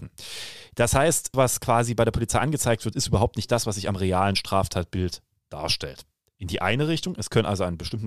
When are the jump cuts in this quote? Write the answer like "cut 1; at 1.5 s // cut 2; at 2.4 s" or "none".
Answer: cut 1; at 1.3 s